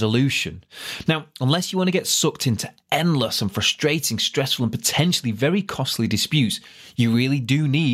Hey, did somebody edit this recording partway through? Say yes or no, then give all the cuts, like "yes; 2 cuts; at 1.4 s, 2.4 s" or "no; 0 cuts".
no; 0 cuts